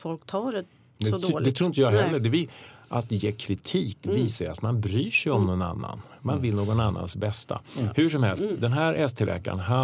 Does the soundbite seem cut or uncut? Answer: uncut